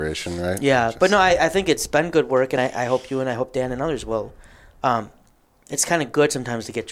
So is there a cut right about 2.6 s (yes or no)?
no